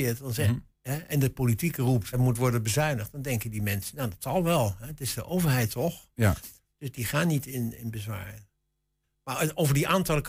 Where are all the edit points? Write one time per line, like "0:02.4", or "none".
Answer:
0:02.1